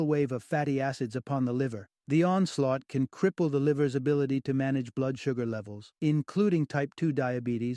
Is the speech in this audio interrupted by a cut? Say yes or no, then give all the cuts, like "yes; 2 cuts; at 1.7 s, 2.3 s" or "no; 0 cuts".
yes; 2 cuts; at 2.0 s, 6.0 s